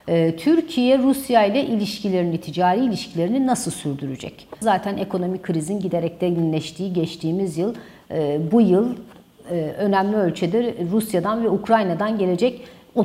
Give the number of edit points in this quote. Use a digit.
1